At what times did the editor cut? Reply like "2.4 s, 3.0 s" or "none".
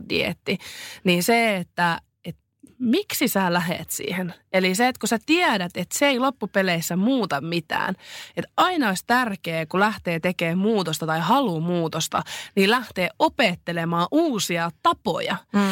none